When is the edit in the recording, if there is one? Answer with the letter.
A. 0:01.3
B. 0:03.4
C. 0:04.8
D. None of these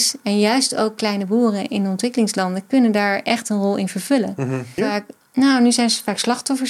C